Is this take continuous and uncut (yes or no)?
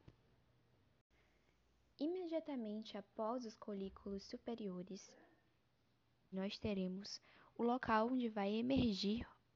no